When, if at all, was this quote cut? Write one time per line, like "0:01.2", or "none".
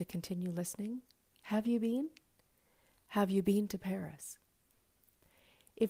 none